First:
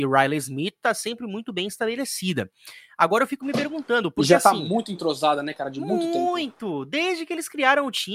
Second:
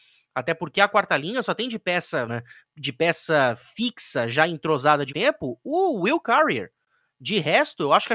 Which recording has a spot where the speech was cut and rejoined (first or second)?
second